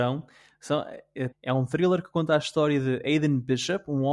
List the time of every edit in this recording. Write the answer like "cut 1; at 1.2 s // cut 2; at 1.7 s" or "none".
cut 1; at 1.3 s